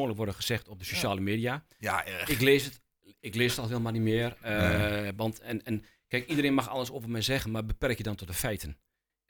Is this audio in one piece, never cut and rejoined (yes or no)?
yes